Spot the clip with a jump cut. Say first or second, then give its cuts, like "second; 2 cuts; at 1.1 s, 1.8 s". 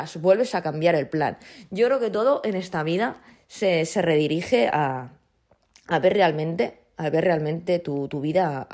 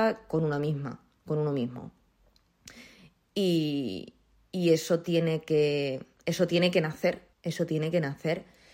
second; 1 cut; at 7.3 s